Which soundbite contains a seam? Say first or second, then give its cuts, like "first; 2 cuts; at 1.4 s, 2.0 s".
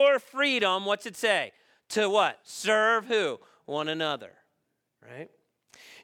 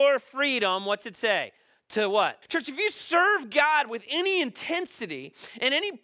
second; 1 cut; at 2.4 s